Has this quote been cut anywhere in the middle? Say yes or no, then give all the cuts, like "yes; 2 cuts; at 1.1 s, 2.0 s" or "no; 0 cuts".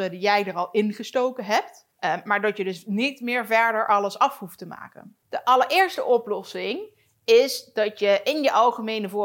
yes; 2 cuts; at 1.9 s, 5.2 s